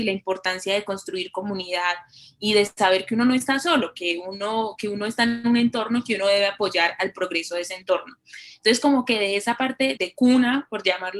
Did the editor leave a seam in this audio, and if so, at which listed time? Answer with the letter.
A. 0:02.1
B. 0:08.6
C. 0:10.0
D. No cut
C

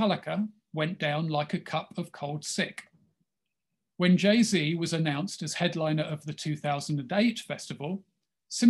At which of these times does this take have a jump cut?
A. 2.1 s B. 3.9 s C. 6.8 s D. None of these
B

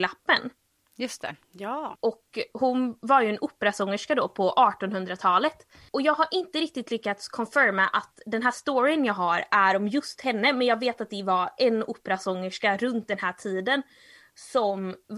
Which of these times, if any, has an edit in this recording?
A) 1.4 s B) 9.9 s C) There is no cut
C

